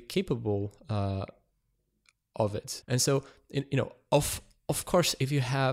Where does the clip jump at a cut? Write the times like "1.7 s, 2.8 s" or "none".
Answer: 2.8 s